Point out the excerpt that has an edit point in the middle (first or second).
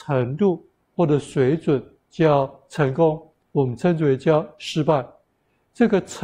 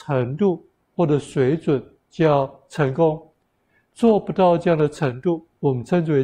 first